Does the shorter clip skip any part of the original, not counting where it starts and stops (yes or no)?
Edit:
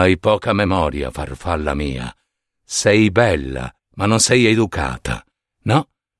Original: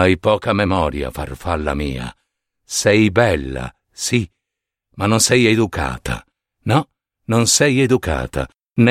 yes